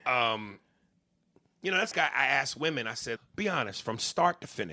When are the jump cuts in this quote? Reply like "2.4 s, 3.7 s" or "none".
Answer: 1.9 s, 3.2 s